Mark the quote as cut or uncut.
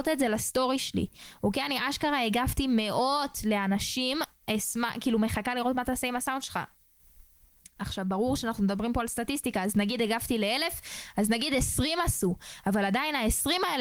uncut